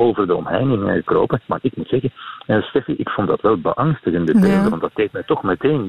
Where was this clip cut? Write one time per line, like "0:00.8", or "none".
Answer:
none